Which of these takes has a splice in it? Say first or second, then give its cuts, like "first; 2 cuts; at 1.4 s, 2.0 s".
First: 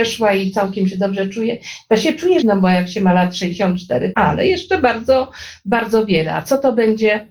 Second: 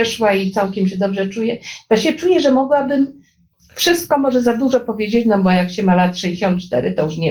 first; 2 cuts; at 2.4 s, 4.1 s